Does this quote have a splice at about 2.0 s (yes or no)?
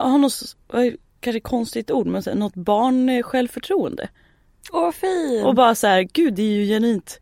no